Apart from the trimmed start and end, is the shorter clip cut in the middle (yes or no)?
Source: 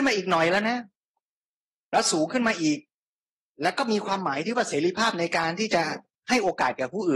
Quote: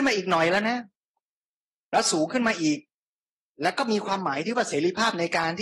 no